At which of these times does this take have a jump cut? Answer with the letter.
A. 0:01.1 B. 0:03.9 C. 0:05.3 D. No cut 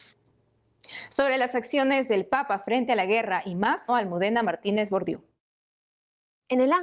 B